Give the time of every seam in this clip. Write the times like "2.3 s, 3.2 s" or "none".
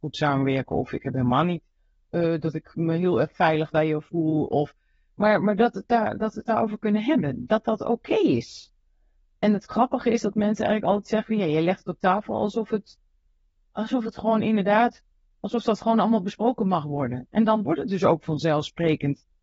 none

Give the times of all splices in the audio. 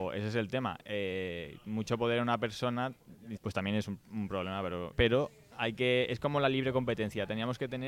3.4 s, 4.9 s

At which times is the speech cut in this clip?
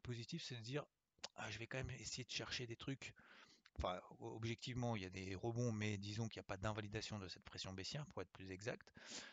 3.7 s

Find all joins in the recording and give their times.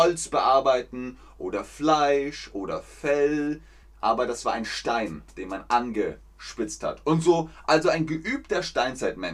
none

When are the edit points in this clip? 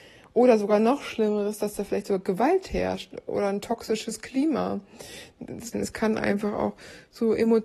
5.7 s

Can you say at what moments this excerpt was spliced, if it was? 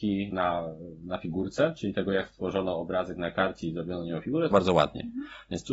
4.5 s

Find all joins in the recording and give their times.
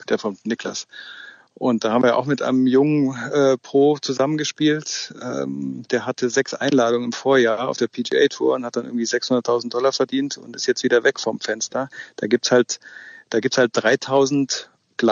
none

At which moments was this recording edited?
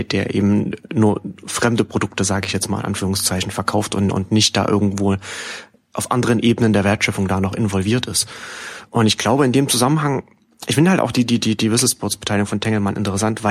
none

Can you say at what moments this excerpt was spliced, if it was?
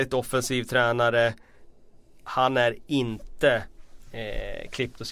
none

